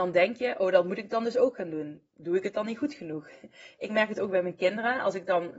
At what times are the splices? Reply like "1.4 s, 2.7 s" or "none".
none